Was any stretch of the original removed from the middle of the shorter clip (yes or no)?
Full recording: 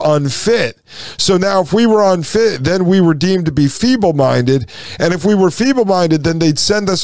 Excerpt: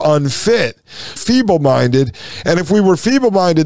yes